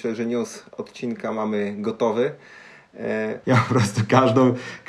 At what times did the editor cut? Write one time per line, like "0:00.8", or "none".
0:03.4